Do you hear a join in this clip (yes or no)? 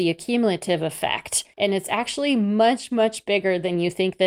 no